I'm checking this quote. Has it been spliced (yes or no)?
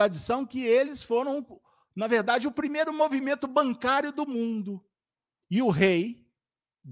yes